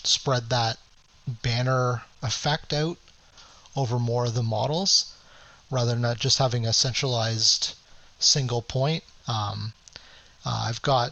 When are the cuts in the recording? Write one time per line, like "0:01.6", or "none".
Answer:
0:09.2

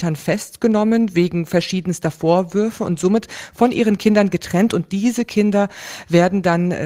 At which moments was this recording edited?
none

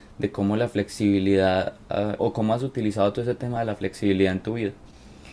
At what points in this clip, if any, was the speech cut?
0:02.2

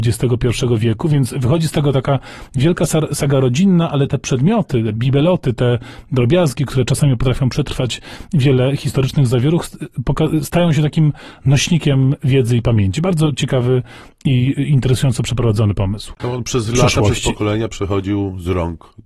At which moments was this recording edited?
0:16.2

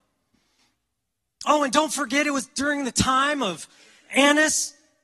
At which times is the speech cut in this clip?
none

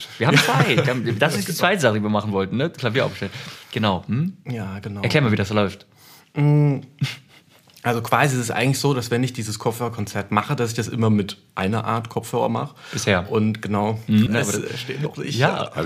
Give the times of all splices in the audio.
0:14.3

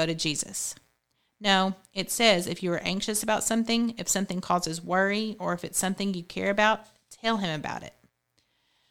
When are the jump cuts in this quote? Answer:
none

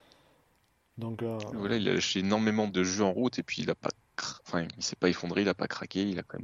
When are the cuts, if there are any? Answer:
0:02.7

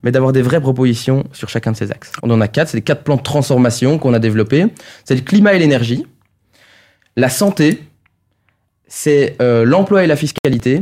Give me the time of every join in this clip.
0:02.2

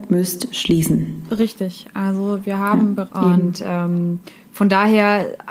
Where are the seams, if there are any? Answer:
0:03.1

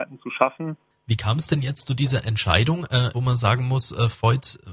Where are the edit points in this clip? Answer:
0:00.9
0:03.1

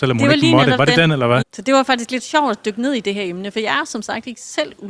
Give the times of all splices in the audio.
0:01.4

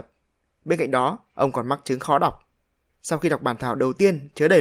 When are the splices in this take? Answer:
0:02.9

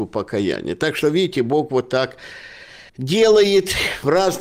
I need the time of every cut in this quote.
0:02.9

